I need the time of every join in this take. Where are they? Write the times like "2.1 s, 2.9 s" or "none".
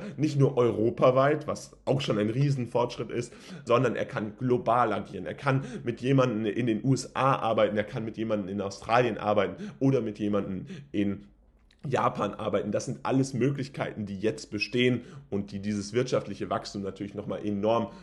3.7 s